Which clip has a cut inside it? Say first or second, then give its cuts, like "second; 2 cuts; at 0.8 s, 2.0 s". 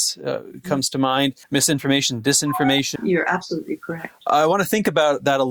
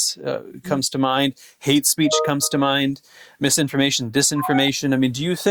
first; 2 cuts; at 1.4 s, 3.0 s